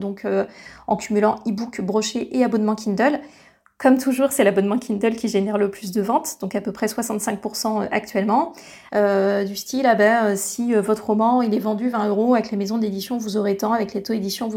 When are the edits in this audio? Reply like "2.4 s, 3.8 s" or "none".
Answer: 8.9 s